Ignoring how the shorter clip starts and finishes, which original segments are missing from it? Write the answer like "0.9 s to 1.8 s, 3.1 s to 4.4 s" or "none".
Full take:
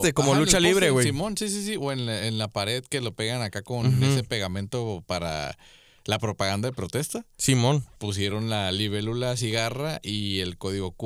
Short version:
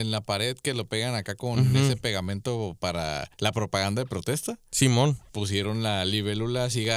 5.6 s to 6.0 s